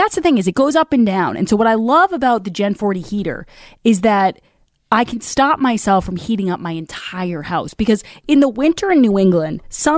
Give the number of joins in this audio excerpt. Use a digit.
0